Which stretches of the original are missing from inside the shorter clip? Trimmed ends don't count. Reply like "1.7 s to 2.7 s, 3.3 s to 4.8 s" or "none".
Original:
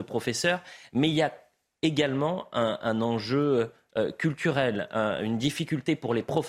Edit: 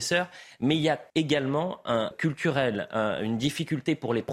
1.4 s to 1.8 s, 2.8 s to 4.1 s